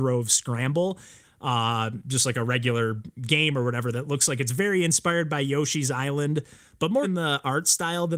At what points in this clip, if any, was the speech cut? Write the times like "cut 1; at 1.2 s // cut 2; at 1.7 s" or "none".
cut 1; at 1.2 s // cut 2; at 7.0 s